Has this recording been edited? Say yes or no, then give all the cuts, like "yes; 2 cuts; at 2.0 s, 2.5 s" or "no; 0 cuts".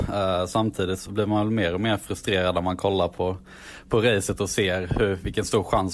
yes; 1 cut; at 1.0 s